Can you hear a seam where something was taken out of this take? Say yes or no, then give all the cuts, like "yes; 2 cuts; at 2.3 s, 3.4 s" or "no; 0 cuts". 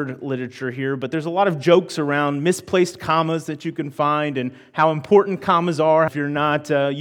yes; 1 cut; at 6.1 s